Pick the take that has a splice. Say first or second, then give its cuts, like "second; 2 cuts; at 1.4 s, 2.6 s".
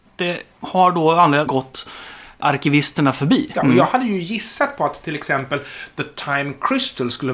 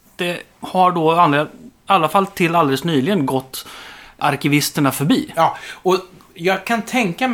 first; 2 cuts; at 1.5 s, 3.5 s